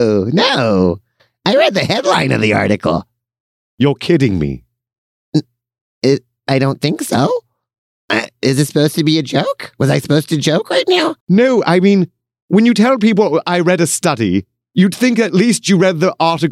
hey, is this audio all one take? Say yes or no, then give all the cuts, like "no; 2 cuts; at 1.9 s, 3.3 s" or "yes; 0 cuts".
no; 1 cut; at 11.2 s